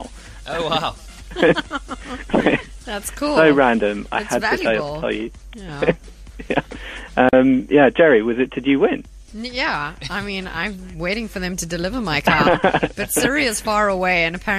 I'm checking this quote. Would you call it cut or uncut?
uncut